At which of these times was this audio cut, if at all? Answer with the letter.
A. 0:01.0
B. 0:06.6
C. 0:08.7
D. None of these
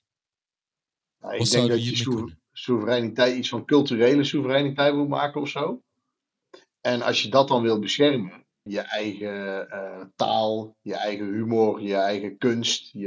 C